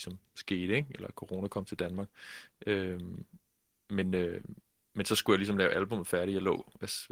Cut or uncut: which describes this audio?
uncut